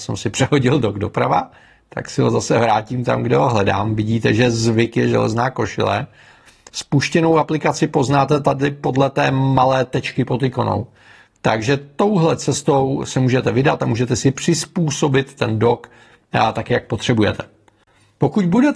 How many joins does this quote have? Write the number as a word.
zero